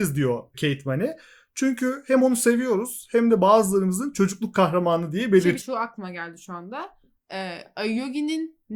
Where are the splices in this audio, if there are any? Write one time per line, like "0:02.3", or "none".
0:05.6